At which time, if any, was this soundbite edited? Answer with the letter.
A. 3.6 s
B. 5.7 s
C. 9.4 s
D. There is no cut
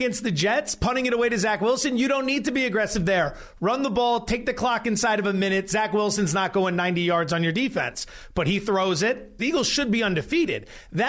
C